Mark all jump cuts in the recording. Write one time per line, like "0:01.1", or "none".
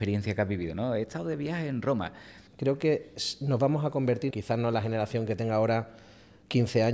0:02.5
0:04.3